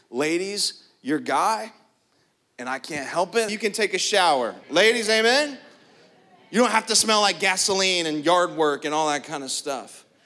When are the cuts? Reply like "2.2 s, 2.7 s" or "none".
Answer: 3.5 s, 4.6 s